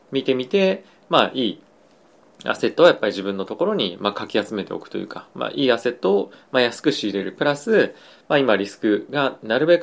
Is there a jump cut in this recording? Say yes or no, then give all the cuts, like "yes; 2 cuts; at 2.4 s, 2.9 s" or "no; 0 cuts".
no; 0 cuts